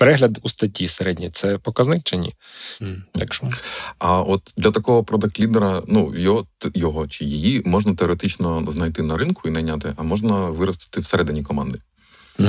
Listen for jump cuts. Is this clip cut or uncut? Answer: cut